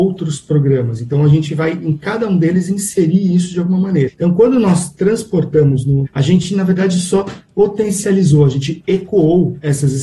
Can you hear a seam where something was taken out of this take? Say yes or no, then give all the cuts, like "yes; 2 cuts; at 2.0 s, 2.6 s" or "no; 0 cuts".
yes; 2 cuts; at 4.1 s, 6.0 s